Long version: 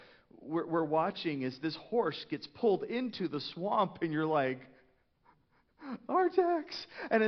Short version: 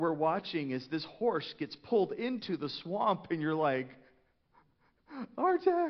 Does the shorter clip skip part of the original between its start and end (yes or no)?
no